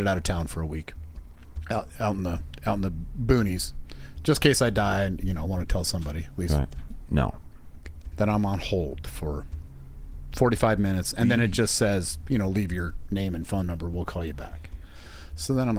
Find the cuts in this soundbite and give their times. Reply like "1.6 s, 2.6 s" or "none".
7.1 s, 8.1 s